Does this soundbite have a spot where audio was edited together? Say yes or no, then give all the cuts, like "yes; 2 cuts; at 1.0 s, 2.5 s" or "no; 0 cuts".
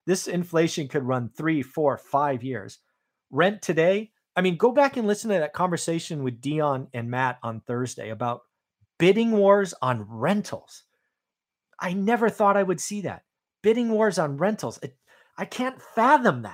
no; 0 cuts